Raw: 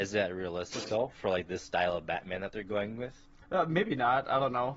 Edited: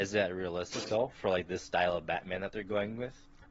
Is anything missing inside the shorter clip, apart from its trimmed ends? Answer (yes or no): no